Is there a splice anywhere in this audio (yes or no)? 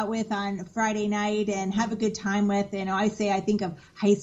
no